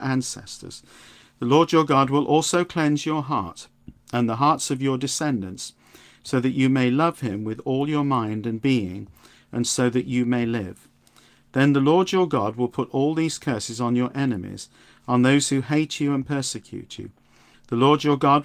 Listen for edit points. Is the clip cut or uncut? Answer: cut